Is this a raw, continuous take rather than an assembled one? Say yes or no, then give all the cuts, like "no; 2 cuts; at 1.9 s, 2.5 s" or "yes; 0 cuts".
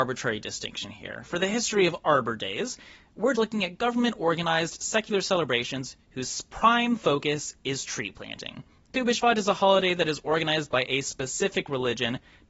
no; 1 cut; at 3.4 s